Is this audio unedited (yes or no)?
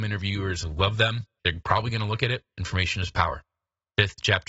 no